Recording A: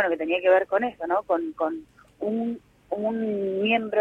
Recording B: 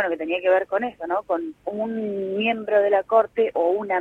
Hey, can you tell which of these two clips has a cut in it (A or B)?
B